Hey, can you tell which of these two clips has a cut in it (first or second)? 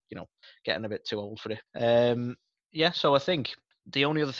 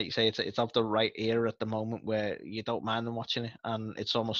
first